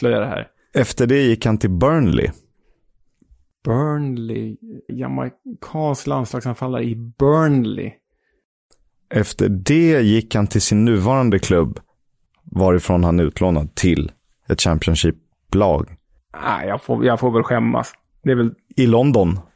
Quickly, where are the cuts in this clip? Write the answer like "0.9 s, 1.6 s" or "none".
4.9 s, 12.3 s